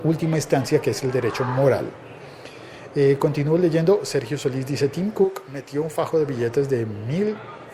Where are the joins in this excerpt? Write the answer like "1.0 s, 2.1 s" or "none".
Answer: none